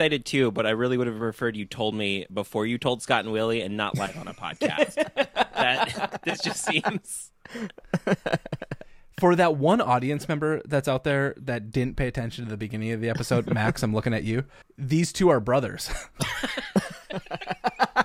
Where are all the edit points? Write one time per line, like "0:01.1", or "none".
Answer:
none